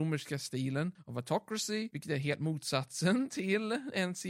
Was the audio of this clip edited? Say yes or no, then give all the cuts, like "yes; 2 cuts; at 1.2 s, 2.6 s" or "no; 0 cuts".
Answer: no; 0 cuts